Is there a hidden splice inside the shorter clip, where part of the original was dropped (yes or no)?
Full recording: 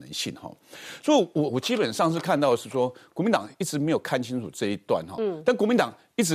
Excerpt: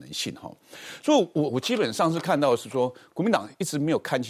no